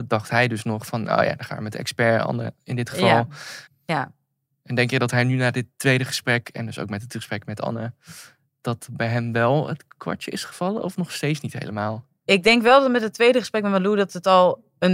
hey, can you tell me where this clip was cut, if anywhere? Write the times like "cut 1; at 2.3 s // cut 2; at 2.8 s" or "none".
cut 1; at 3.7 s